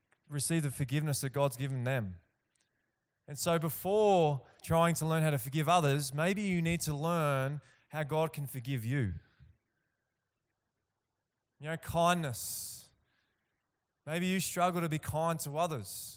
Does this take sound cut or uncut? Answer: cut